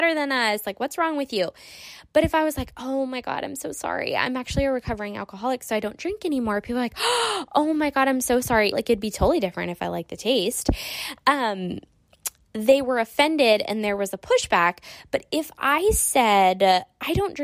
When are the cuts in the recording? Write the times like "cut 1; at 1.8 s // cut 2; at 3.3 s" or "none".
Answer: cut 1; at 8.7 s